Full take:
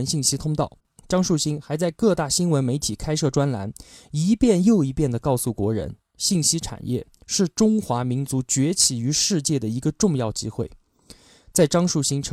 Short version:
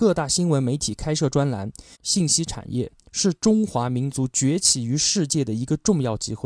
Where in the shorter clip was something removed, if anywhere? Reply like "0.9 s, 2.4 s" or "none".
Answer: 1.9 s